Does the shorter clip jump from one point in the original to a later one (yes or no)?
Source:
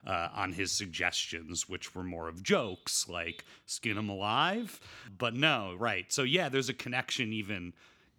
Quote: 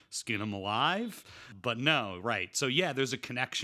no